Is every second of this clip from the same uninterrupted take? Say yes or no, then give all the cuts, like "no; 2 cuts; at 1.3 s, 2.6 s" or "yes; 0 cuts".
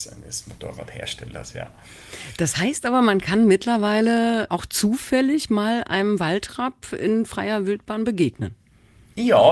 yes; 0 cuts